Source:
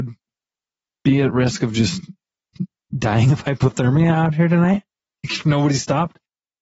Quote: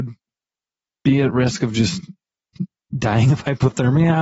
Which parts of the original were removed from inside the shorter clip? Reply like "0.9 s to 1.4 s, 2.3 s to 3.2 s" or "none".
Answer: none